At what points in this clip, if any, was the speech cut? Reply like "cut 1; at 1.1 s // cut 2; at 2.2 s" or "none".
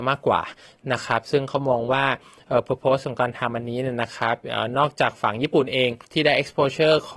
cut 1; at 6.0 s

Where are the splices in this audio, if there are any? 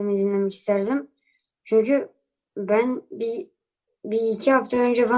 none

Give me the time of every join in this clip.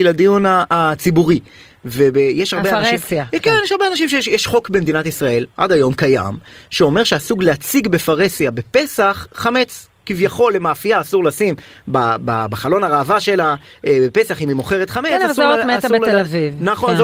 none

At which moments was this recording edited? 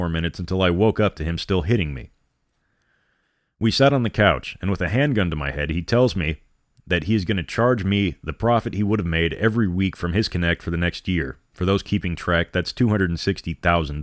none

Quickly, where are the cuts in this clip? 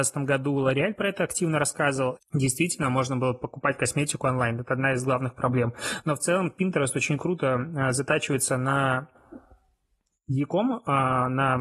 cut 1; at 2.2 s

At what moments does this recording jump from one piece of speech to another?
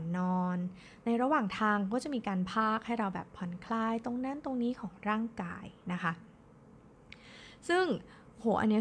none

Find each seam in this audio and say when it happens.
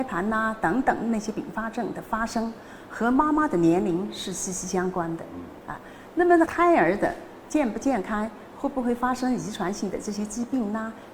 none

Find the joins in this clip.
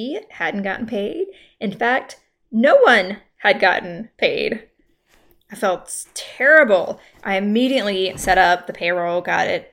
none

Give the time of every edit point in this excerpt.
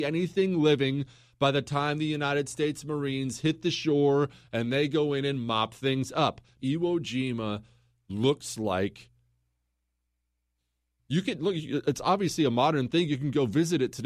cut 1; at 6.6 s // cut 2; at 11.0 s

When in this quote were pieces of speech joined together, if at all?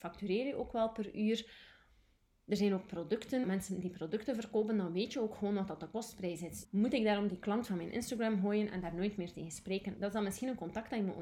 cut 1; at 3.4 s // cut 2; at 6.6 s // cut 3; at 10.0 s

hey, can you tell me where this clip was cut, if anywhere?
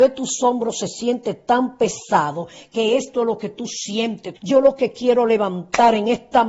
cut 1; at 4.4 s

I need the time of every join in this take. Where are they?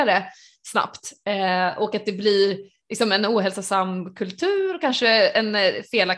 none

